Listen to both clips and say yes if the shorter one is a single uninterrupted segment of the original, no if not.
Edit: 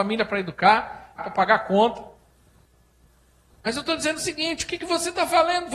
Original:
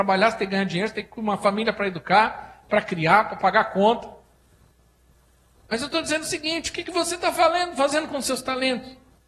no